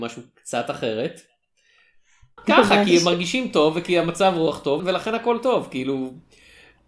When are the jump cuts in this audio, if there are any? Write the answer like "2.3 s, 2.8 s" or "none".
2.4 s, 4.8 s